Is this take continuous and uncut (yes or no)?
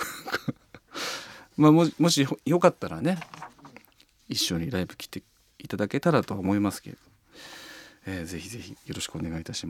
yes